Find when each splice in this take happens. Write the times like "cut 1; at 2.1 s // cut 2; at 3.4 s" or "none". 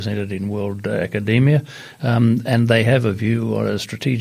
none